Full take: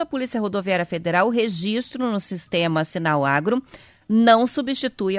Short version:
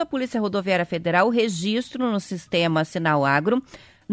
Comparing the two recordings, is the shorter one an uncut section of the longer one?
yes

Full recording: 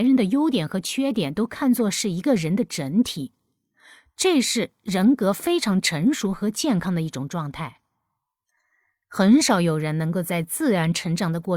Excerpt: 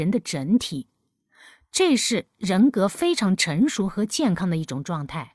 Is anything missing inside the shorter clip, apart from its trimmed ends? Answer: no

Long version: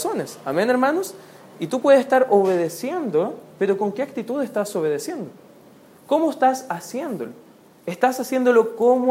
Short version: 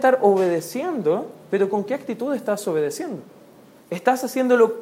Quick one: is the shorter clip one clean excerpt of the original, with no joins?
no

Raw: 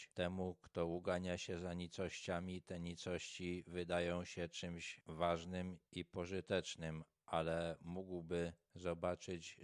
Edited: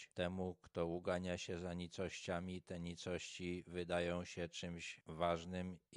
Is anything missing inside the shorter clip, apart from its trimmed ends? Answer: no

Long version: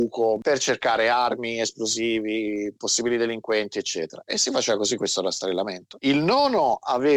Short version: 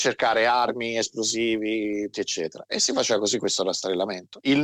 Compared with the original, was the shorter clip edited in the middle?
yes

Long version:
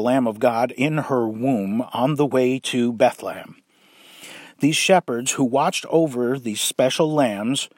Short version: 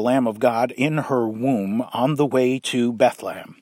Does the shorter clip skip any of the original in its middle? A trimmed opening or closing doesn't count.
no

